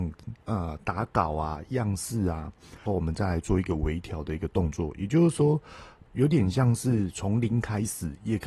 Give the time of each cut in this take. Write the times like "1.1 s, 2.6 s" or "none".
2.9 s